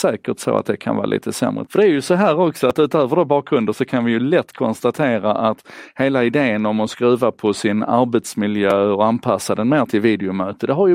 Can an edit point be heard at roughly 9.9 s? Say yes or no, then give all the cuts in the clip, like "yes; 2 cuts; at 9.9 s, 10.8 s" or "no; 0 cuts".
yes; 2 cuts; at 1.7 s, 9.9 s